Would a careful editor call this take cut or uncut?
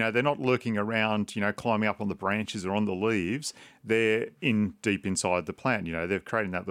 uncut